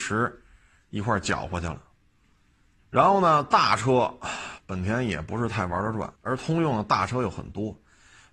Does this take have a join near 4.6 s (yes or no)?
no